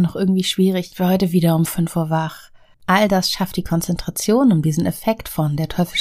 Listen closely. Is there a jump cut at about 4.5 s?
no; 2 cuts; at 0.9 s, 2.7 s

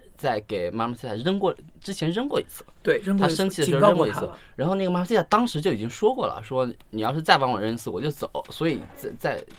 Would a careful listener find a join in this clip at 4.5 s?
no; 0 cuts

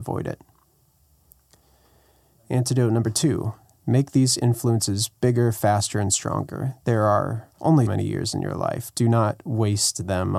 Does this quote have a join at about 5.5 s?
no; 1 cut; at 7.9 s

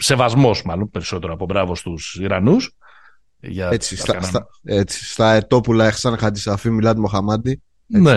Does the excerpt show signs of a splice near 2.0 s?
no; 1 cut; at 4.1 s

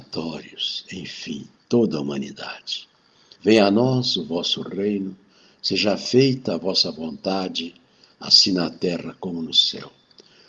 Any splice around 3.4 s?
yes; 1 cut; at 3.4 s

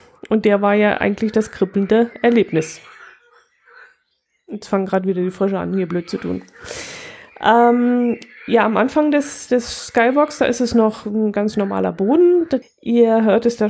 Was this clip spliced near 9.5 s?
no; 1 cut; at 12.6 s

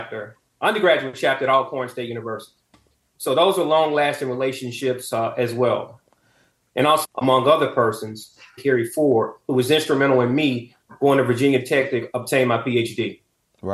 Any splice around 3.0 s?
no; 2 cuts; at 7.0 s, 8.6 s

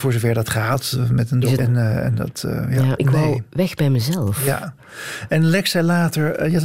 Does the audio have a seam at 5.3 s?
no; 2 cuts; at 1.6 s, 3.0 s

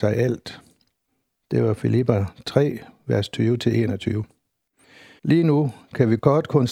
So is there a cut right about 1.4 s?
no; 1 cut; at 5.2 s

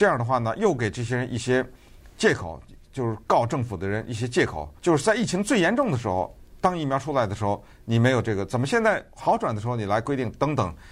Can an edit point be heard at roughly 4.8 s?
yes; 1 cut; at 4.8 s

